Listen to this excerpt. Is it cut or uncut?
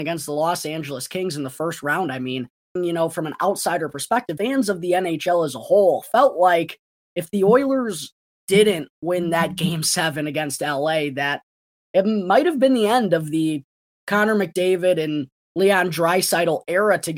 cut